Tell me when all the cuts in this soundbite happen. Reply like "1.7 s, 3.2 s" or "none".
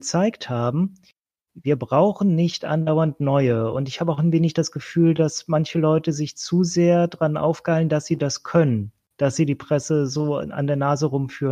none